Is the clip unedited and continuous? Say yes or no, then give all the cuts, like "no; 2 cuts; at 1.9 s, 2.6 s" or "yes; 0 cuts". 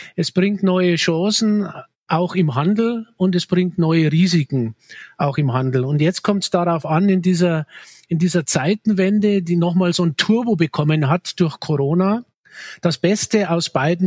yes; 0 cuts